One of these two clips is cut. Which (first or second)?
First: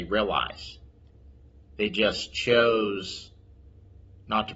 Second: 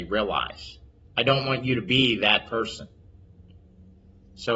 second